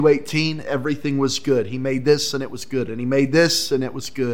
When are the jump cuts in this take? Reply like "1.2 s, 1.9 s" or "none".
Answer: 2.9 s